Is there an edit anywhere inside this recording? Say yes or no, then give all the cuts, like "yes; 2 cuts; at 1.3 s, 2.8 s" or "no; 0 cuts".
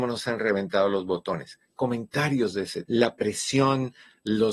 yes; 1 cut; at 2.9 s